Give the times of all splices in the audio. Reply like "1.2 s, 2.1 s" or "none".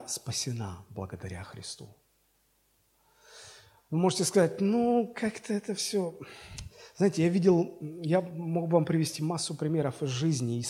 none